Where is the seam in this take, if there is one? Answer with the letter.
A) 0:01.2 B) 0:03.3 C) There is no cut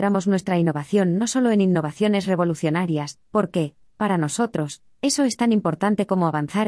B